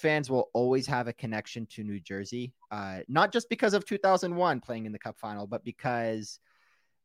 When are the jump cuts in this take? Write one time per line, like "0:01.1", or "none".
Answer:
none